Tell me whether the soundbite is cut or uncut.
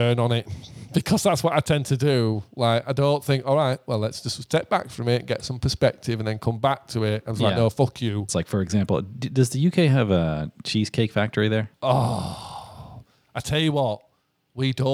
cut